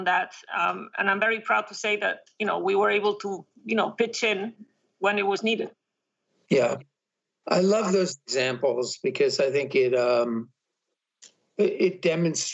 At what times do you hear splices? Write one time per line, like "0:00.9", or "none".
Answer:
none